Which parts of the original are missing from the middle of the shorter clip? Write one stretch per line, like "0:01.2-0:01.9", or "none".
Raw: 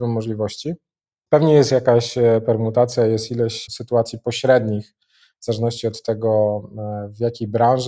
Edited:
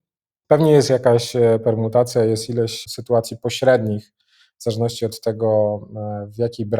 none